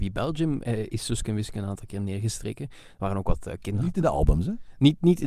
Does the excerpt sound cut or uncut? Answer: uncut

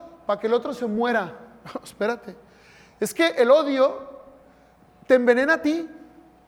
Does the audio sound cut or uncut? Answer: uncut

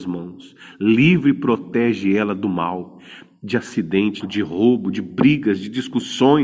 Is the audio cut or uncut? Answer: cut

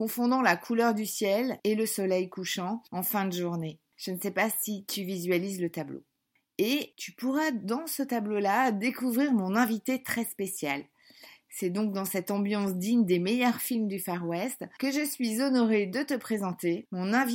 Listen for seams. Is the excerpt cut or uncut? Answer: uncut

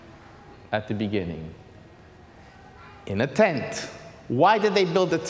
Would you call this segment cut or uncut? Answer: uncut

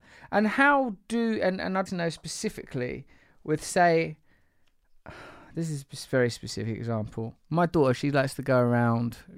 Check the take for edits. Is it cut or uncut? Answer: cut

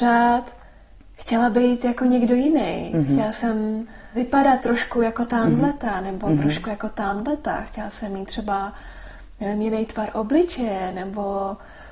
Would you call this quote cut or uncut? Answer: uncut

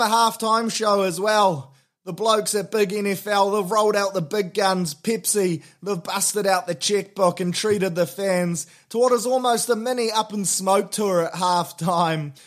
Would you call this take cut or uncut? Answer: uncut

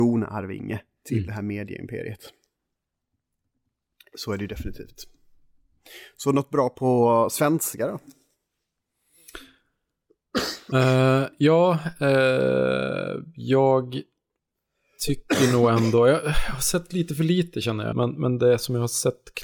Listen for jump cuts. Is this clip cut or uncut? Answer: cut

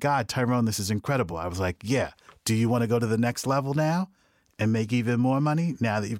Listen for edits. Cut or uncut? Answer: uncut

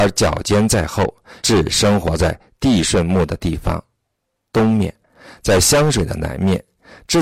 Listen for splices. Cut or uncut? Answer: cut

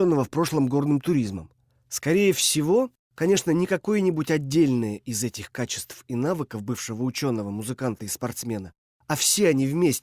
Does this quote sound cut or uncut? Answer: cut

